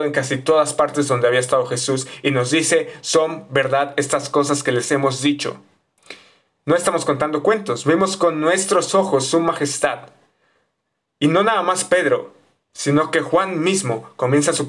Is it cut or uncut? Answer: uncut